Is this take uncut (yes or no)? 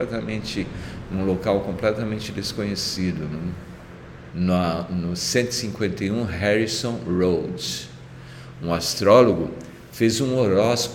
no